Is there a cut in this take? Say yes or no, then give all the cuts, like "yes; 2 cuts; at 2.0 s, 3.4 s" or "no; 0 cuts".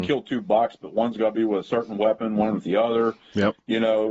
no; 0 cuts